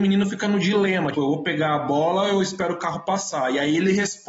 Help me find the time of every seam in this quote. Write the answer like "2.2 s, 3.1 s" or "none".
1.1 s